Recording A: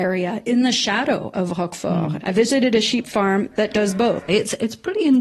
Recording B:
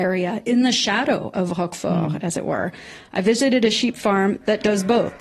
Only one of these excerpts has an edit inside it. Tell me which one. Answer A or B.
A